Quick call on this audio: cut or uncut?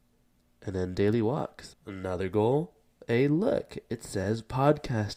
cut